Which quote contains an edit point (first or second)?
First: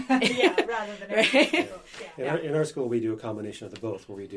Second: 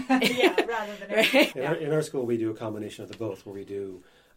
second